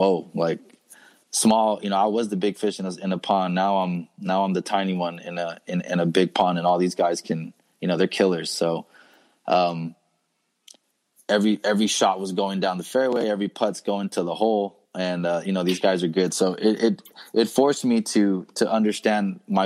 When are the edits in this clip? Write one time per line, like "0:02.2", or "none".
0:14.9